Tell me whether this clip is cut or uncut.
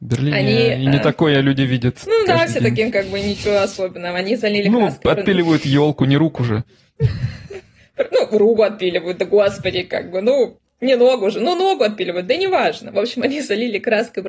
uncut